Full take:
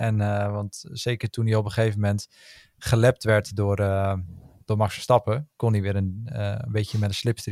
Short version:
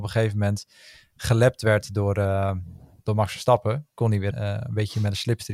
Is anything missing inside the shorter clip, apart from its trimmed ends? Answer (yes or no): yes